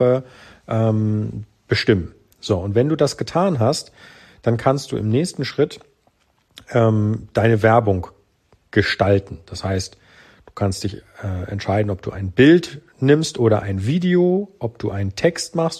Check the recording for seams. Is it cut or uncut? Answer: uncut